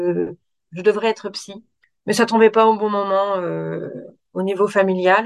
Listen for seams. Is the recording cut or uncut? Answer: uncut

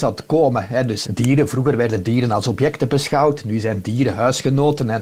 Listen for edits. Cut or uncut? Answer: cut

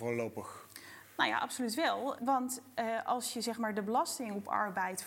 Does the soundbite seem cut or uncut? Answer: cut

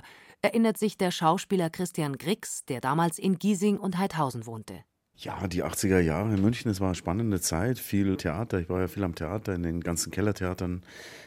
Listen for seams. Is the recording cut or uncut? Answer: cut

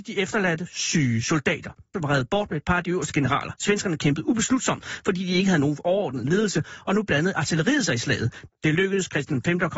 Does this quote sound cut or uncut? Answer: cut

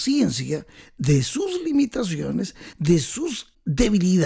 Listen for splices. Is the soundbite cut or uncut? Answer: uncut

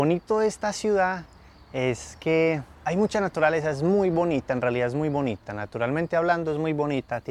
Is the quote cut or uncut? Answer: uncut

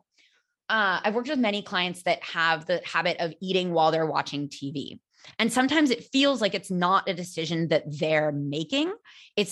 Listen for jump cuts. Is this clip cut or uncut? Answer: uncut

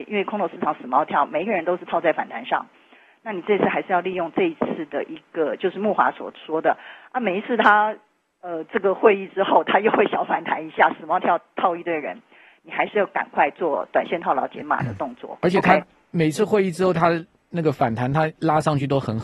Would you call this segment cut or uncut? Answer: uncut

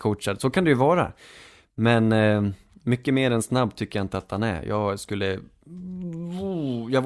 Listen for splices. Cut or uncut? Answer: uncut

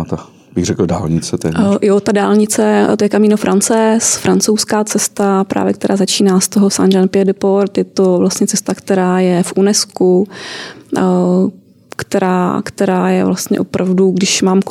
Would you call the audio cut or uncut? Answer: uncut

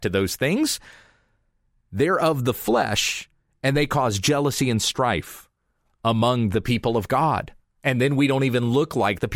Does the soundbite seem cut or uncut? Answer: uncut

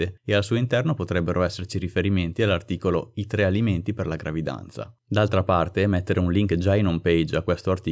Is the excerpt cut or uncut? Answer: uncut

